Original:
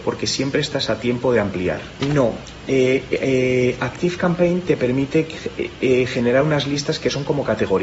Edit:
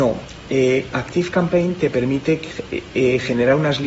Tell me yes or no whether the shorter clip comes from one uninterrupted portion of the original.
no